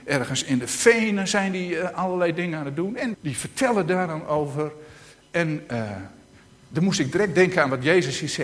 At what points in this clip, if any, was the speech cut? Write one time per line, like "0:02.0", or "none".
0:03.1